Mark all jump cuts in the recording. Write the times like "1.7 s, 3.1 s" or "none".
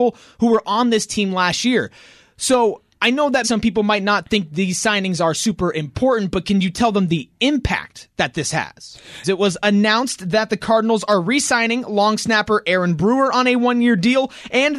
3.4 s, 9.2 s